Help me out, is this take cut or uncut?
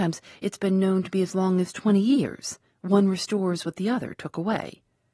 cut